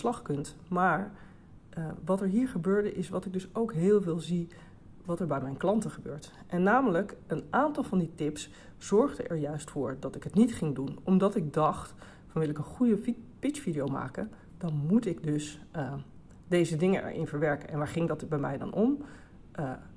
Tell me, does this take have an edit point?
no; 0 cuts

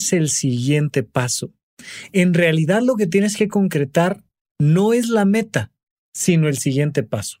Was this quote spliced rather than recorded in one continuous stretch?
no; 0 cuts

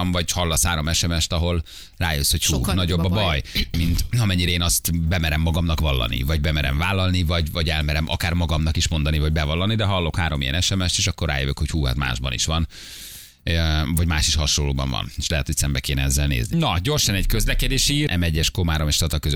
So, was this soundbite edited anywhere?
yes; 2 cuts; at 16.5 s, 18.1 s

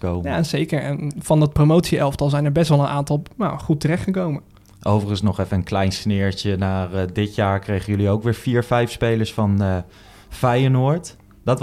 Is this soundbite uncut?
yes; 0 cuts

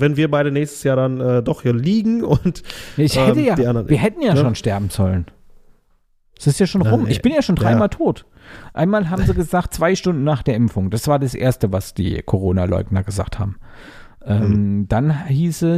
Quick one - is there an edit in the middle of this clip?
no; 0 cuts

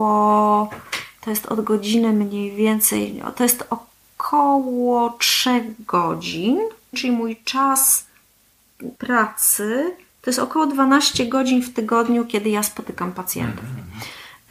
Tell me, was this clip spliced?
yes; 2 cuts; at 6.9 s, 9.0 s

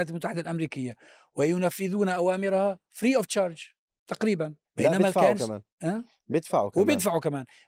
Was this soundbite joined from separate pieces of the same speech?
no; 0 cuts

